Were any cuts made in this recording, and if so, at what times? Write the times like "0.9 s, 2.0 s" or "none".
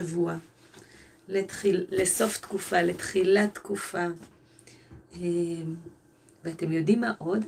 1.9 s